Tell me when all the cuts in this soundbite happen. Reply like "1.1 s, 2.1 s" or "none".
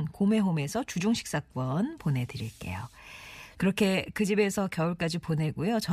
3.5 s